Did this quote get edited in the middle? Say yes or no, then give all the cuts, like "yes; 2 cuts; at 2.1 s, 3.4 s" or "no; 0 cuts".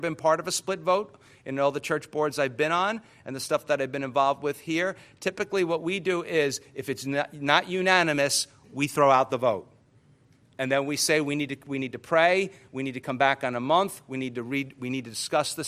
no; 0 cuts